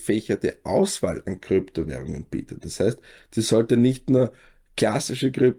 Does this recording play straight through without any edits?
yes; 0 cuts

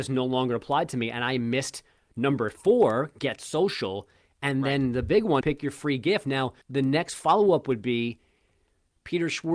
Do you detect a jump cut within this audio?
yes; 2 cuts; at 5.4 s, 6.6 s

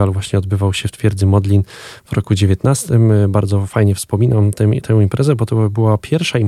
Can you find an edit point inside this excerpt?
no; 0 cuts

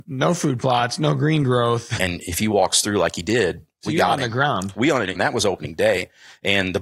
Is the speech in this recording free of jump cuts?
no; 2 cuts; at 2.0 s, 5.1 s

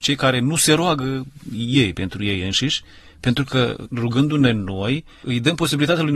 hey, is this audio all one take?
yes; 0 cuts

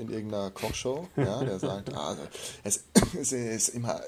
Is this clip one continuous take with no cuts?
yes; 0 cuts

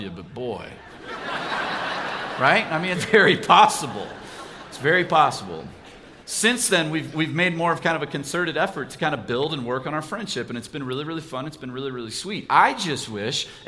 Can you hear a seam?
yes; 2 cuts; at 2.9 s, 6.2 s

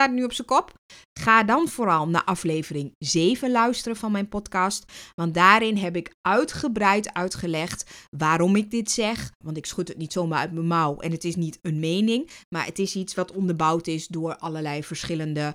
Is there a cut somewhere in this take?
yes; 1 cut; at 9.4 s

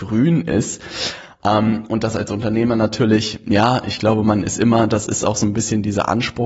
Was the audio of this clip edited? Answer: no; 0 cuts

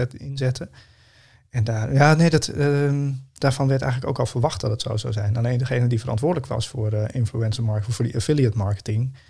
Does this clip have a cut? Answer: no; 0 cuts

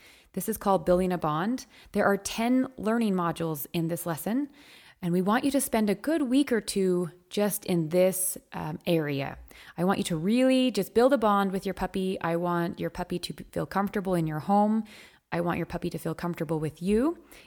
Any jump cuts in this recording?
no; 0 cuts

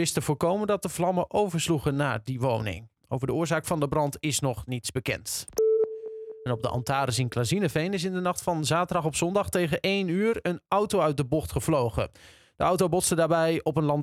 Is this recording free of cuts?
yes; 0 cuts

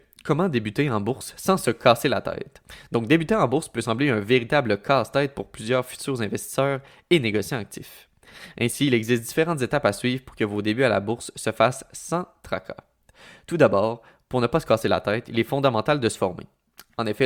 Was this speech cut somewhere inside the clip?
no; 0 cuts

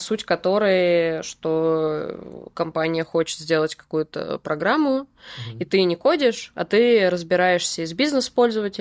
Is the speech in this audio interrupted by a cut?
no; 0 cuts

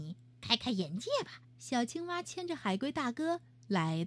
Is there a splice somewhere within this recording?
yes; 1 cut; at 1.4 s

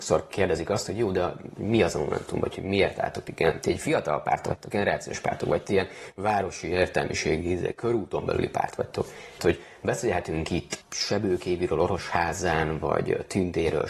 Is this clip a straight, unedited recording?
no; 1 cut; at 9.4 s

